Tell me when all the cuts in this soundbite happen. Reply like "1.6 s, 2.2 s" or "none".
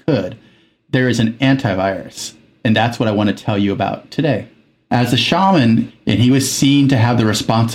4.8 s, 5.9 s